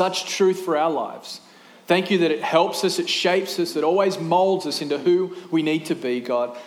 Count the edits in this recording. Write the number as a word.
zero